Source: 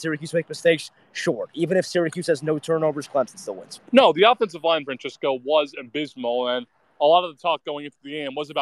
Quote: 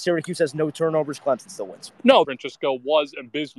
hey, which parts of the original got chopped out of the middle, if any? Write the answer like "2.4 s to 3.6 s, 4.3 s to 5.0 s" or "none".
4.1 s to 4.8 s